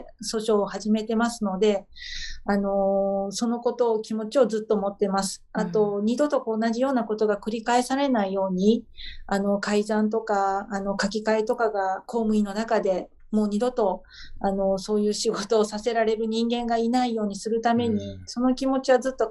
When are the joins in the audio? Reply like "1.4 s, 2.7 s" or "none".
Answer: 12.1 s, 18.3 s